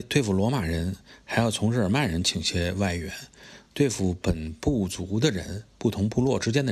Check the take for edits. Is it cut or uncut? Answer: uncut